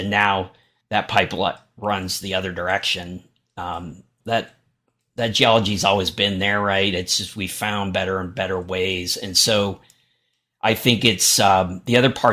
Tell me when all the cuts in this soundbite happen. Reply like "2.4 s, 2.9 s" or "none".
4.2 s